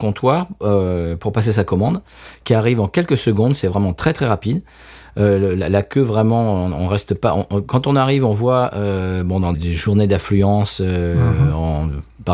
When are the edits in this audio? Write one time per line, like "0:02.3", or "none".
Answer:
0:09.5